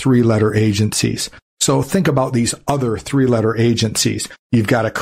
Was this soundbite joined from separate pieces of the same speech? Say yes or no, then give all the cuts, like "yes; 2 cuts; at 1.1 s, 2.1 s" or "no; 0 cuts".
no; 0 cuts